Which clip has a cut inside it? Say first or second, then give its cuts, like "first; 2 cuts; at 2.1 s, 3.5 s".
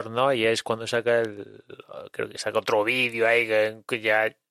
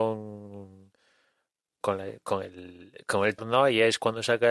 second; 2 cuts; at 1.8 s, 3.4 s